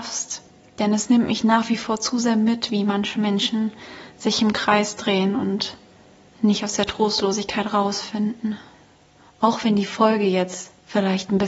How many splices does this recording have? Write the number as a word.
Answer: zero